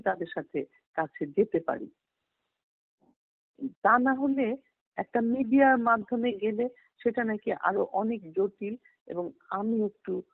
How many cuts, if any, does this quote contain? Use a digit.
0